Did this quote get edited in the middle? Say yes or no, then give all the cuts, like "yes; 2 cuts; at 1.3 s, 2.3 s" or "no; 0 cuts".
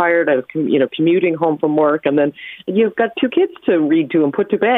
no; 0 cuts